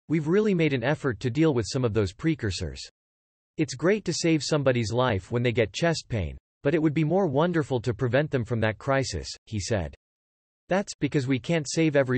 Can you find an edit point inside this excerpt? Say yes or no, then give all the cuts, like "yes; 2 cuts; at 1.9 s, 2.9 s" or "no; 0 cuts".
no; 0 cuts